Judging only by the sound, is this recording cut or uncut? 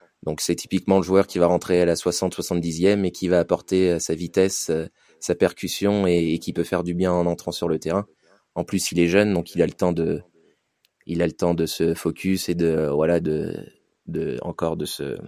uncut